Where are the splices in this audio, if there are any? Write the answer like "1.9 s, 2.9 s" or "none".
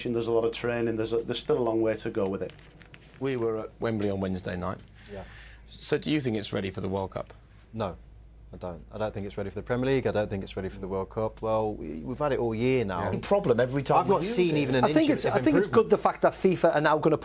11.4 s, 13.1 s